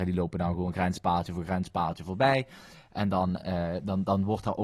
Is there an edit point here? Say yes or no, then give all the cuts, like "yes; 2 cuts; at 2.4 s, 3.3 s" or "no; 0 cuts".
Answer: no; 0 cuts